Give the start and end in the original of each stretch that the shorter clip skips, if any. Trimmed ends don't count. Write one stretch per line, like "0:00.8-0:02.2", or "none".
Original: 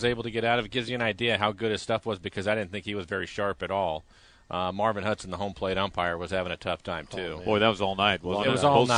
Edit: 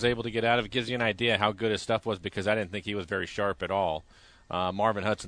none